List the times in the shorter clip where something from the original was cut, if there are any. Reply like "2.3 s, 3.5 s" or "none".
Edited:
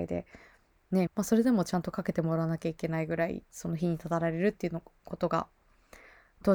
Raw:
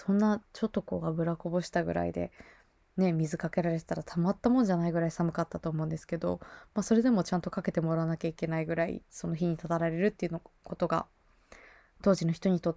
1.1 s